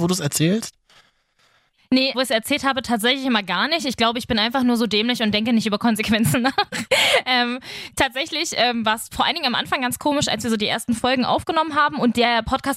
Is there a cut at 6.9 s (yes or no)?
no